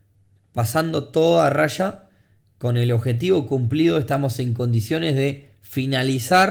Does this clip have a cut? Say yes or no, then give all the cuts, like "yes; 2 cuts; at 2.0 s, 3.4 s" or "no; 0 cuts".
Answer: no; 0 cuts